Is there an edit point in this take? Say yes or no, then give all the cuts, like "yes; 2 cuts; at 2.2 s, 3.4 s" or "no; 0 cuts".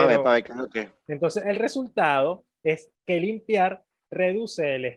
yes; 2 cuts; at 1.1 s, 3.0 s